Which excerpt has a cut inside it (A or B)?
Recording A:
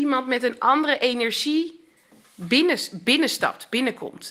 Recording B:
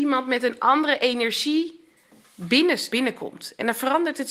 B